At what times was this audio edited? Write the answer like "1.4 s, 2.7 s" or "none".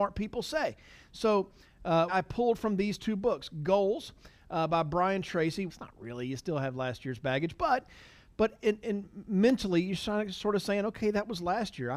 2.1 s, 5.7 s

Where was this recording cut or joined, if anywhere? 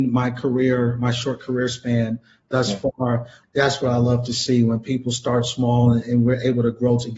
3.4 s

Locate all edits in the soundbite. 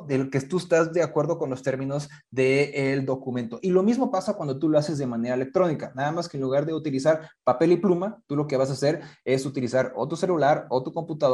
none

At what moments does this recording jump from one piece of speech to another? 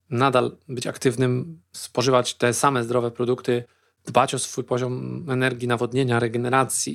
none

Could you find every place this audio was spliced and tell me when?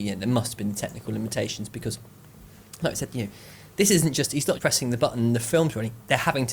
4.6 s

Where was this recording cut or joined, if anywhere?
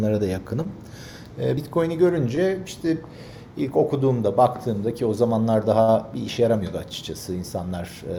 none

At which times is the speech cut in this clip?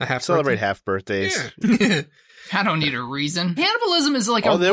1.6 s, 3.6 s

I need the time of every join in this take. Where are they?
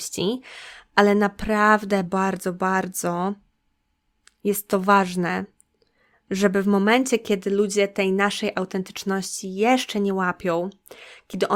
2.0 s

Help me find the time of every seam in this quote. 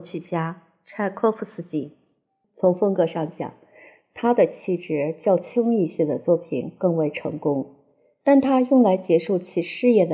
2.4 s

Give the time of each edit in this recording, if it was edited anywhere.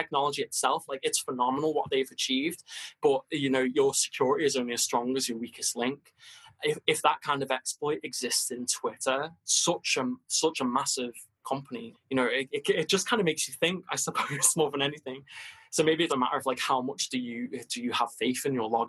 11.9 s, 16.1 s

